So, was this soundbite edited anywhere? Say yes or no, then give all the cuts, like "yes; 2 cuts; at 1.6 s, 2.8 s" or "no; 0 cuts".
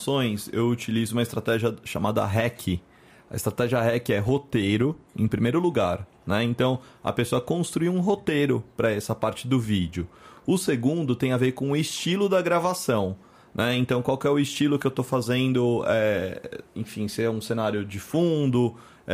no; 0 cuts